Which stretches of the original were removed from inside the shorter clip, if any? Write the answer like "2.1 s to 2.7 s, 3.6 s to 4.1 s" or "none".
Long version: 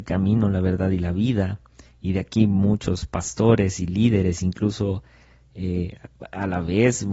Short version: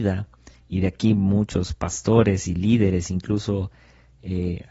none